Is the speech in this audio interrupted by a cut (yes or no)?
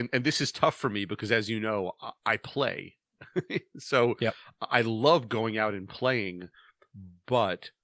no